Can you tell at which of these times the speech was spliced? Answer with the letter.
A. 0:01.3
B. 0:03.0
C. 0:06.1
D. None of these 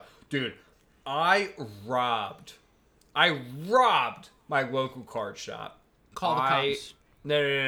C